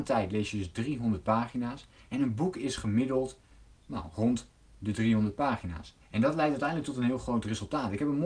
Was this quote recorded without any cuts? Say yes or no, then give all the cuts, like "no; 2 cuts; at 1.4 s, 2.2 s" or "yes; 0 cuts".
no; 1 cut; at 6.0 s